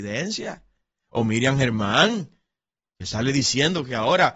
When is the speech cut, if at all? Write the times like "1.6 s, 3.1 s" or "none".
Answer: none

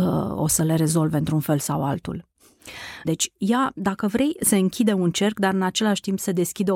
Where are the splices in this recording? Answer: 3.0 s

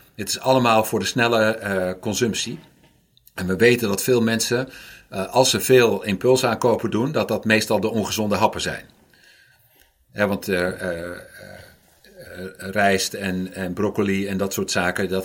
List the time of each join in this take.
none

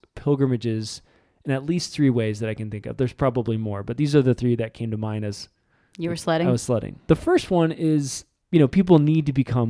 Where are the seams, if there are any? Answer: 7.0 s, 8.4 s

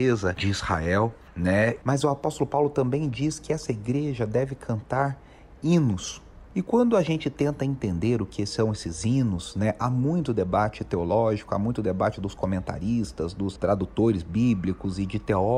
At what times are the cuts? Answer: 1.8 s

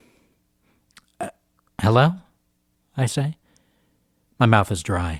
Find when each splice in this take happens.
none

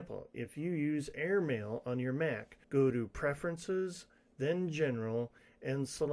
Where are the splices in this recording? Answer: 2.6 s

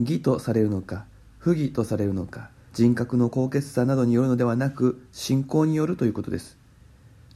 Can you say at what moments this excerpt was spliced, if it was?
2.7 s

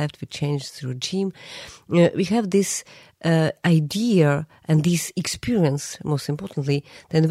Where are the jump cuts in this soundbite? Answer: none

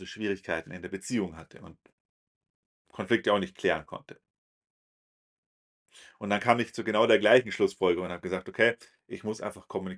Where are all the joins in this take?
none

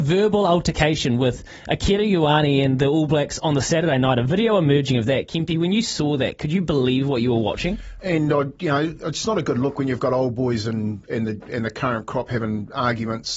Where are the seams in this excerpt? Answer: 8.0 s

